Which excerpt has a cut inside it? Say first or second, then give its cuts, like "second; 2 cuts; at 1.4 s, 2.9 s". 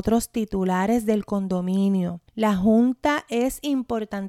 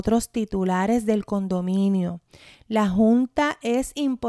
first; 1 cut; at 2.3 s